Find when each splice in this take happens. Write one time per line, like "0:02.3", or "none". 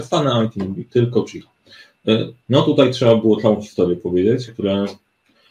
0:02.4
0:04.5